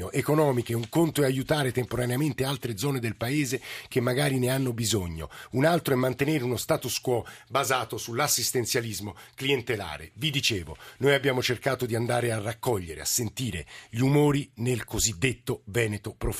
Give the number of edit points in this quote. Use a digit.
0